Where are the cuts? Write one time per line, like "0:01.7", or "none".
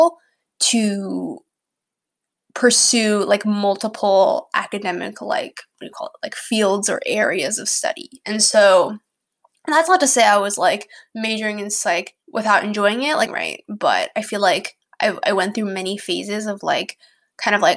0:12.2
0:13.3